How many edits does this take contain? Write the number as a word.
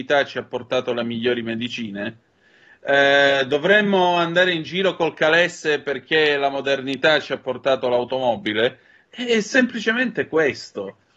one